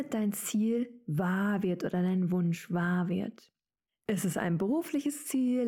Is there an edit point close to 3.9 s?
yes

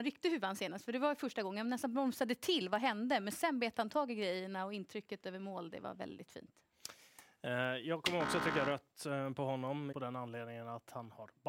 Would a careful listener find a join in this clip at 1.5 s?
no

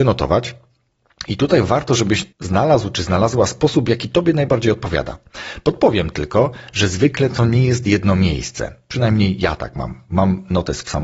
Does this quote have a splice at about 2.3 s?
yes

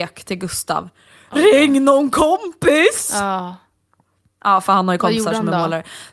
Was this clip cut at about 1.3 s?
no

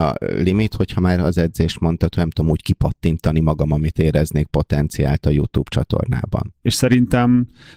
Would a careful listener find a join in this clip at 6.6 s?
yes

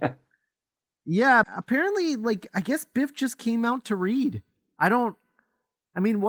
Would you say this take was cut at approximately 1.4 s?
yes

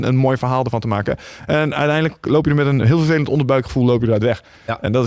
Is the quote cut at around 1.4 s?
no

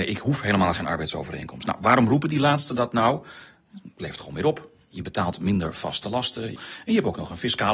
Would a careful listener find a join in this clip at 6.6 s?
yes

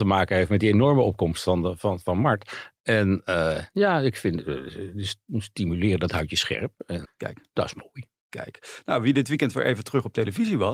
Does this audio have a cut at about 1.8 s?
no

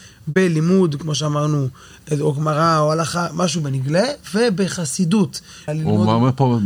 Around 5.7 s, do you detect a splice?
yes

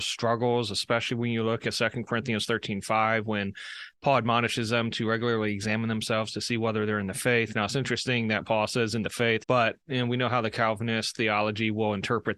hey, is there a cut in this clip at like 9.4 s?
yes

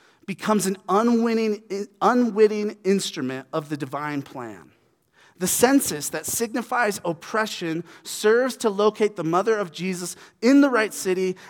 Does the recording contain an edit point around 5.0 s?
no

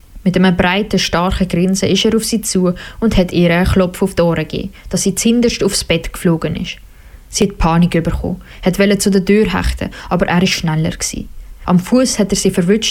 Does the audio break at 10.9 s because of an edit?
no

